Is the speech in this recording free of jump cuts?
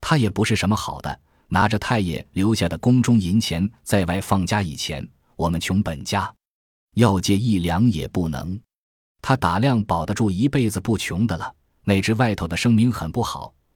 yes; 0 cuts

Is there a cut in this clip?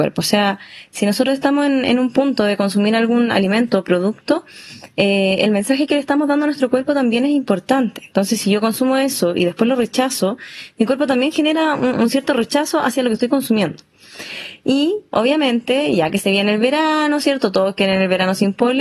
no; 0 cuts

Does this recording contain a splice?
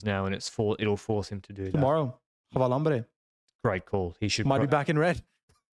no; 0 cuts

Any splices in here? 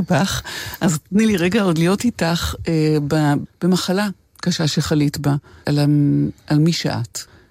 yes; 2 cuts; at 3.5 s, 5.6 s

